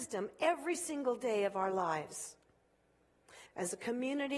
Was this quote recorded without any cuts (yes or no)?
no